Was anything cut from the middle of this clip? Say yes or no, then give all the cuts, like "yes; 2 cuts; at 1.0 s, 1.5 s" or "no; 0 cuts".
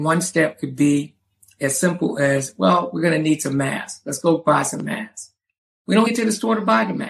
yes; 1 cut; at 6.1 s